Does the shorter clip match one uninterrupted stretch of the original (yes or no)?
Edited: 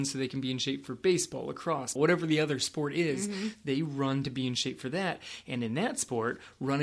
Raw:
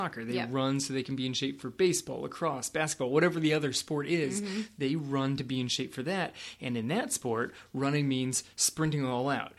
no